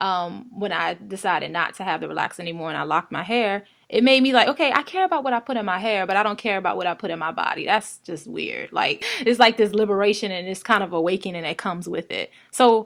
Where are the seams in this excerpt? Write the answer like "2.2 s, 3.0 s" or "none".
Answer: none